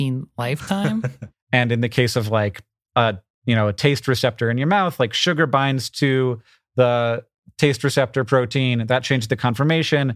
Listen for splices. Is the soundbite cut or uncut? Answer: cut